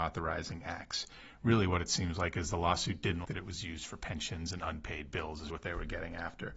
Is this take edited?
yes; 2 cuts; at 3.2 s, 5.5 s

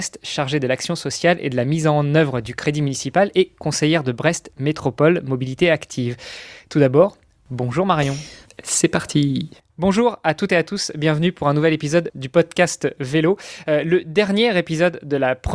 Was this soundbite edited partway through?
yes; 1 cut; at 8.4 s

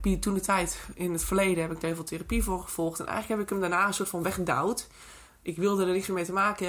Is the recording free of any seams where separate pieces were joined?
yes; 0 cuts

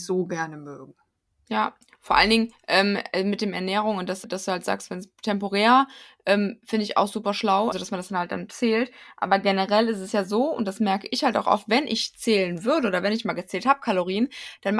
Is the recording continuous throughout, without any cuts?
no; 2 cuts; at 4.2 s, 7.7 s

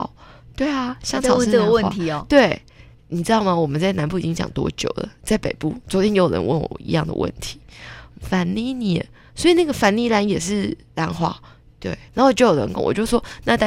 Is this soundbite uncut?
no; 2 cuts; at 8.1 s, 12.1 s

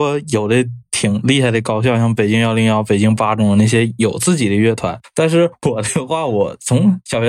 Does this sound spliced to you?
no; 0 cuts

